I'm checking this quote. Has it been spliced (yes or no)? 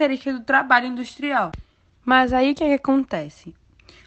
no